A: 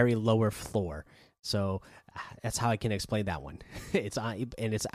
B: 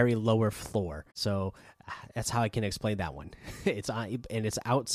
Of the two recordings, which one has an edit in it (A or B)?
B